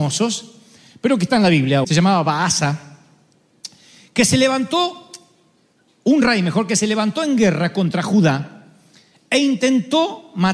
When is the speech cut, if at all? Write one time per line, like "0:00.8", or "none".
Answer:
0:01.8

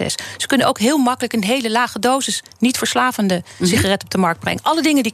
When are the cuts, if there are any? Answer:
none

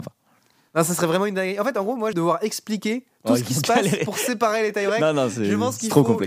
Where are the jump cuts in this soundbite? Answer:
0:02.1

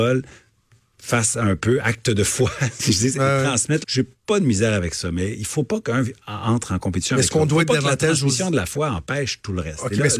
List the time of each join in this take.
0:03.8

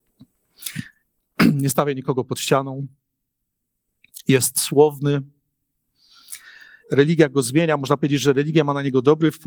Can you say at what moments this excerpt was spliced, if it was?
0:06.8

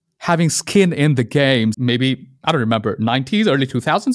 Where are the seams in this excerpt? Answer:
0:01.7

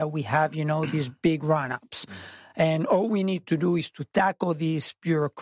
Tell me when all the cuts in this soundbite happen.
none

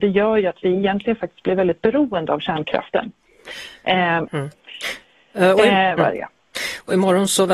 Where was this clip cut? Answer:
0:04.3
0:06.0

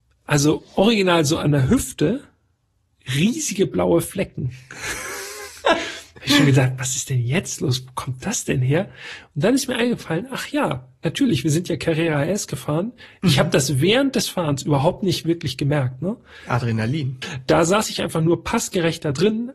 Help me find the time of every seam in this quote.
0:17.2

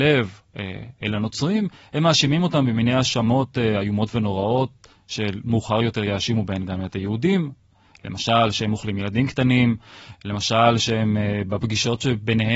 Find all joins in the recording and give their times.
none

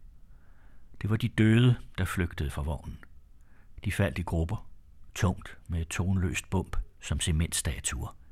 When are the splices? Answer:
none

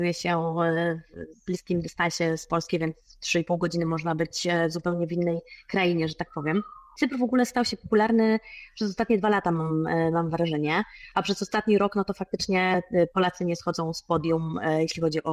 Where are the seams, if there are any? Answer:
none

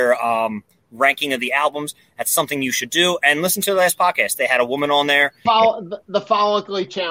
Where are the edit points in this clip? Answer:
0:05.5

